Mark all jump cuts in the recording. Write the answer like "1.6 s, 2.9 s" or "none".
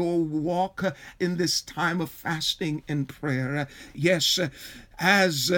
none